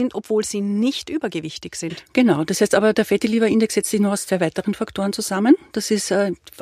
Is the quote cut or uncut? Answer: uncut